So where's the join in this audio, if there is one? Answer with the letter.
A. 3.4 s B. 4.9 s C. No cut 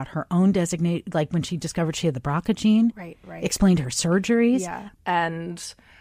B